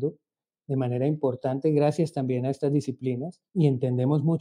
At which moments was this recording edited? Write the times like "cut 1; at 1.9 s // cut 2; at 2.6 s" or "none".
cut 1; at 3.5 s